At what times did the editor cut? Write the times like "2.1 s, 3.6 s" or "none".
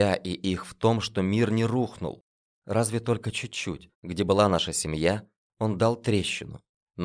3.9 s